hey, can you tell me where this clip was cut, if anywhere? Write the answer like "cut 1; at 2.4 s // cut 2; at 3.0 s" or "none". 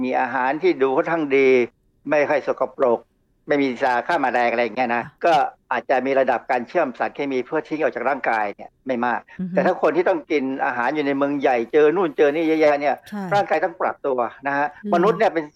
cut 1; at 5.0 s